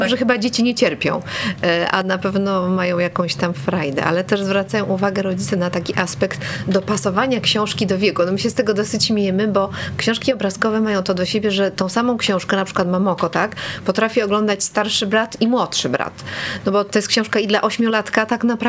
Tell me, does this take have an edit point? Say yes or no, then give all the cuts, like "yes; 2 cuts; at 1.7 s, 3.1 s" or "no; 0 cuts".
no; 0 cuts